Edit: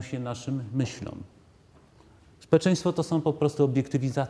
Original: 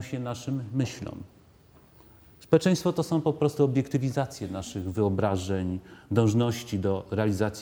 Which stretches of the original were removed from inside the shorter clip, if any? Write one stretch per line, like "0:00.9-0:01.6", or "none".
none